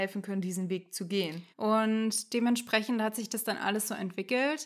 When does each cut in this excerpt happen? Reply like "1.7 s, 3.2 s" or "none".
1.5 s